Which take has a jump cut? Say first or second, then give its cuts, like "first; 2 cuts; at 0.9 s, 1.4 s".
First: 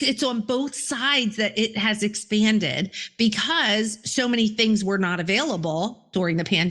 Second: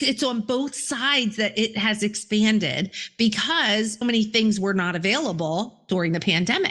second; 1 cut; at 4.0 s